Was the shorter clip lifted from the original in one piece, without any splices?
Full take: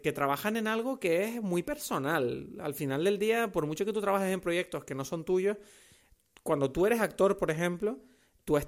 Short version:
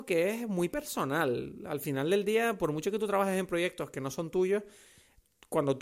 yes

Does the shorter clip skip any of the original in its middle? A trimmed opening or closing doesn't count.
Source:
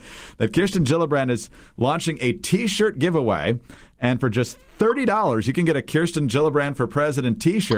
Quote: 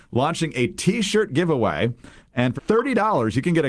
yes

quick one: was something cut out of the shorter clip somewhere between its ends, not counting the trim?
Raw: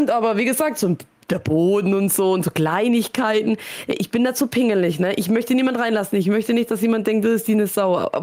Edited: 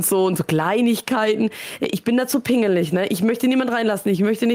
no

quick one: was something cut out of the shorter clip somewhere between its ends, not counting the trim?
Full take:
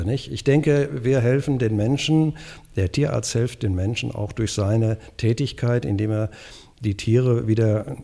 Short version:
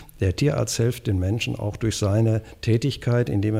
no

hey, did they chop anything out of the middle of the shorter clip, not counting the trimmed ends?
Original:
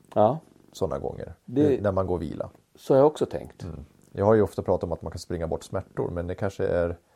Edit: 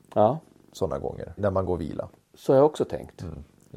yes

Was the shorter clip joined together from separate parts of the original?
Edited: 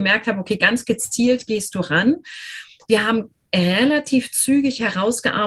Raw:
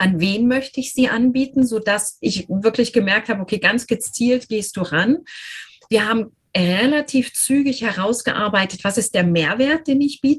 no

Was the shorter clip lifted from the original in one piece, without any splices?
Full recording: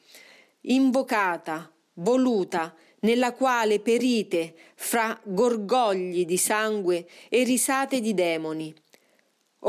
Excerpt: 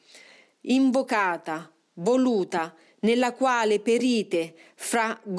yes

